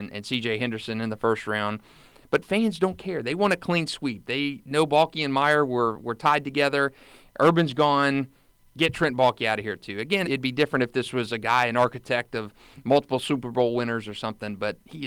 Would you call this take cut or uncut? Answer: cut